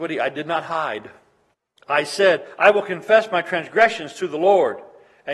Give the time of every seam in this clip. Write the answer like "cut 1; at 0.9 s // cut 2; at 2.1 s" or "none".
none